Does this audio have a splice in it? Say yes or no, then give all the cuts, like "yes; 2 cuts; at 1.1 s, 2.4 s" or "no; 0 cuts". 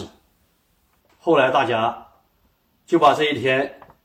yes; 1 cut; at 1.1 s